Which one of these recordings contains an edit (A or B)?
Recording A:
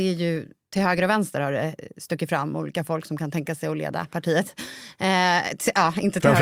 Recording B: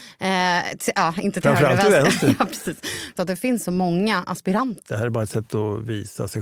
B